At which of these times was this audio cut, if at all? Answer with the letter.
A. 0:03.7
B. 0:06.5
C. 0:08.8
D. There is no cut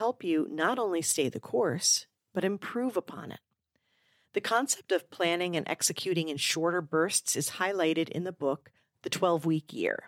D